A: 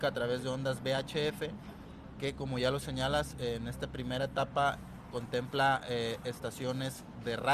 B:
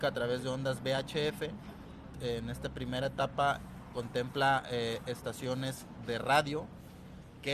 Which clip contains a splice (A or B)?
B